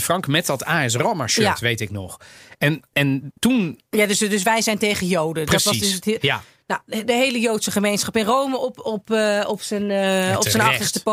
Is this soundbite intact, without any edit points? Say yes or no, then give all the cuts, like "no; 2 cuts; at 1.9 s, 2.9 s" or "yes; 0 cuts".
yes; 0 cuts